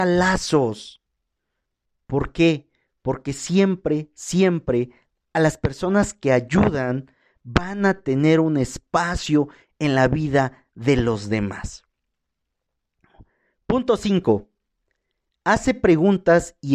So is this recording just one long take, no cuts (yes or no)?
yes